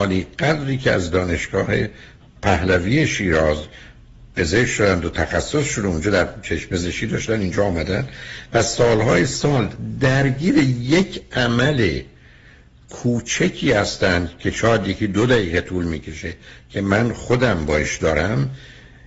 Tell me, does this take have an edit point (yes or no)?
no